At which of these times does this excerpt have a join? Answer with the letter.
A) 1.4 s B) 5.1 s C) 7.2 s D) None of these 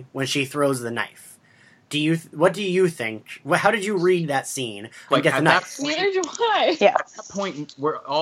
B